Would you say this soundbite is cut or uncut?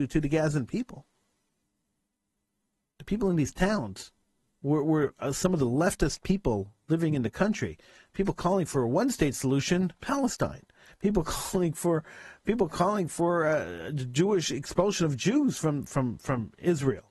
uncut